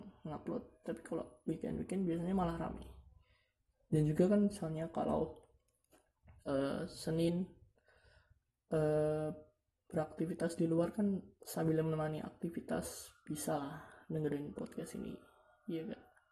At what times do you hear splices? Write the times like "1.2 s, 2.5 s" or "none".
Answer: none